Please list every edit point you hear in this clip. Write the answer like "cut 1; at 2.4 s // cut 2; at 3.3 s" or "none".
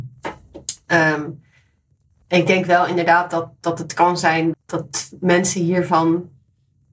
cut 1; at 4.5 s